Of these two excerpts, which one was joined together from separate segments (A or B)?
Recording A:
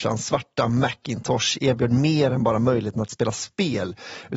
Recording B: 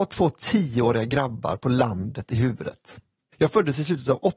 B